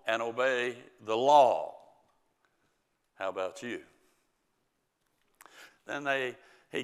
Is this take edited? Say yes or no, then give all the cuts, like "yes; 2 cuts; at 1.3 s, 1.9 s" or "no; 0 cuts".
yes; 1 cut; at 5.7 s